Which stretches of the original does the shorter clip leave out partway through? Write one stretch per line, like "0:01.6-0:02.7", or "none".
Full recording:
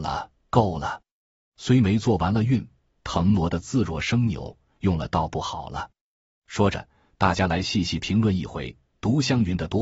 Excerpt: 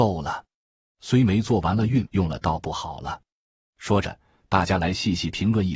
0:02.6-0:04.7